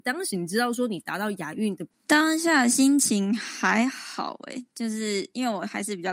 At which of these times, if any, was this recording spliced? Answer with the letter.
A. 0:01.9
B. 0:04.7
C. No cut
A